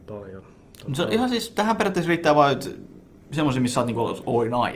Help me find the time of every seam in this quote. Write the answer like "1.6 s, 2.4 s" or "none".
3.2 s